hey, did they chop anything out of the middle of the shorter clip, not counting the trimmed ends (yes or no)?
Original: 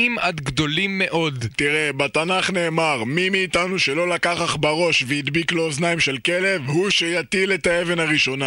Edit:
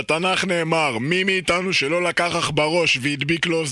no